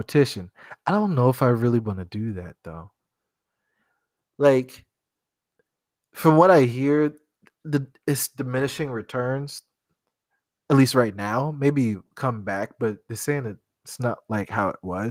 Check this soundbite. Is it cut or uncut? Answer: uncut